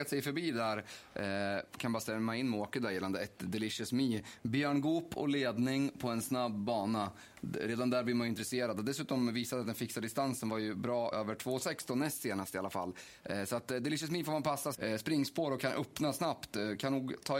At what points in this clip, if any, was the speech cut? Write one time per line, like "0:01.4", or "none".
0:11.1
0:14.7